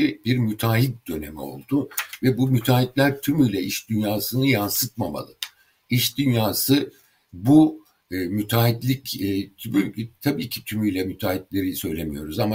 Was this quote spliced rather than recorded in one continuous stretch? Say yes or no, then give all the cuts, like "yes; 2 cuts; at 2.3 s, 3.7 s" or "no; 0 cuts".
no; 0 cuts